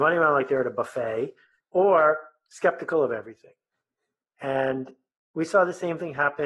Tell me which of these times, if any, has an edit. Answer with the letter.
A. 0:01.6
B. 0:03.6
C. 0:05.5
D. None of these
A